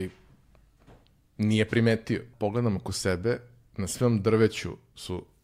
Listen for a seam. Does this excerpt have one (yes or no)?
yes